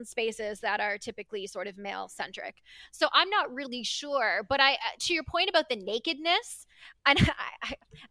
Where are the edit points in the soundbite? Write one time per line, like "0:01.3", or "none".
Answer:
0:02.9